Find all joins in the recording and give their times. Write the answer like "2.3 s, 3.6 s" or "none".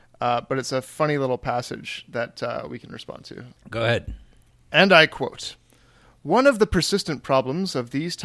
3.6 s